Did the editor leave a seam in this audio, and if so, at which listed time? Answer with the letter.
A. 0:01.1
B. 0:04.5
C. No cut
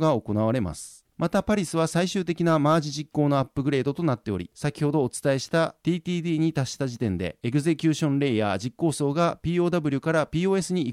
A